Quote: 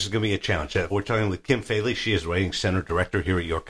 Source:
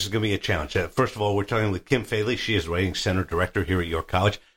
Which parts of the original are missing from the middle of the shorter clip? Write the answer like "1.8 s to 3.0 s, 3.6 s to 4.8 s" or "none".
0.9 s to 1.3 s

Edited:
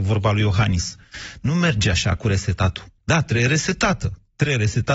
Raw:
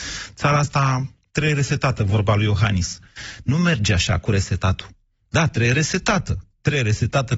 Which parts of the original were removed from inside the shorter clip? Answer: 5.0 s to 5.2 s

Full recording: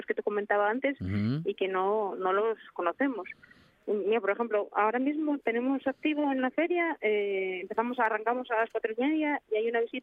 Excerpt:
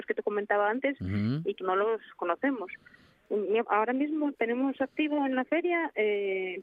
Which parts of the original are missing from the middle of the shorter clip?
1.6 s to 2.2 s, 4.2 s to 4.7 s

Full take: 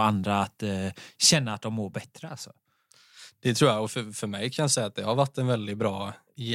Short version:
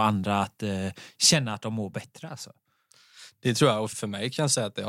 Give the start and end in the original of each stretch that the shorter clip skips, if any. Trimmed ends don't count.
3.9 s to 4.1 s

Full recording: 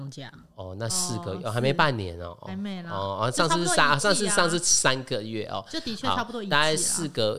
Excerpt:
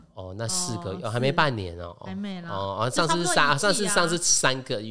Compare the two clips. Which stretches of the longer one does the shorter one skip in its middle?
none

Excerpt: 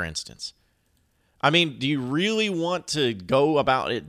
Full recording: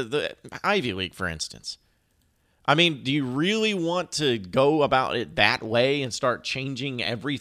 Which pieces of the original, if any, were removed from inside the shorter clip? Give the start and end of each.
none

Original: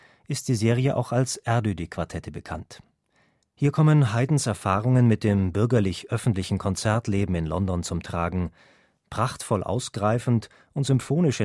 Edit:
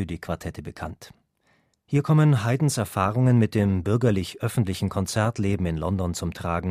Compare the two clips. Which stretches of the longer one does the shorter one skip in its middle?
none

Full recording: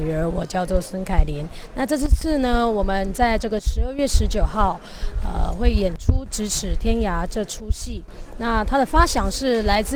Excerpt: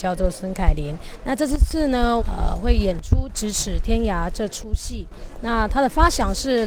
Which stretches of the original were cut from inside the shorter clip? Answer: 2.7 s to 5.2 s

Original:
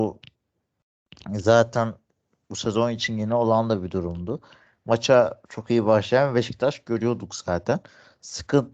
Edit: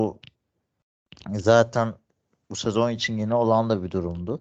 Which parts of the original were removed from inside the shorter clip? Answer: none

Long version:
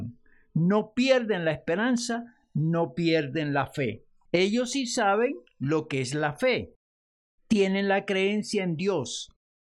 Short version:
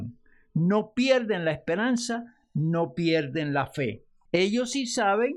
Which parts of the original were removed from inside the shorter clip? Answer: none

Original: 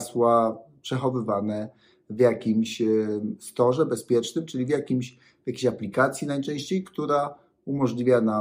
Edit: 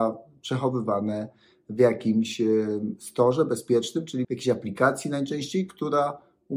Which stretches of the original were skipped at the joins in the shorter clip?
4.7 s to 5.4 s

